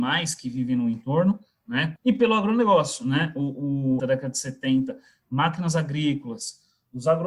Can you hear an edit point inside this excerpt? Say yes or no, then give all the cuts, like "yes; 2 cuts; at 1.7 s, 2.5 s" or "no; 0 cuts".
yes; 2 cuts; at 2.0 s, 4.0 s